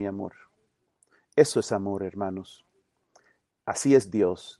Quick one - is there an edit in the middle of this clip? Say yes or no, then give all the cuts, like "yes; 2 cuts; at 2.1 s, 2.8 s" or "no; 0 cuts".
no; 0 cuts